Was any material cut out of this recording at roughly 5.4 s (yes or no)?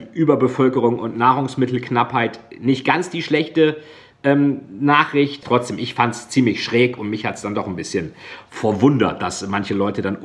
yes